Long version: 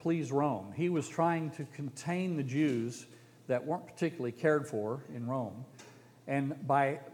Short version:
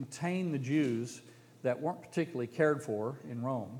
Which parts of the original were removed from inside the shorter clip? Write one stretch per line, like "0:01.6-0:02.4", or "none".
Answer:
none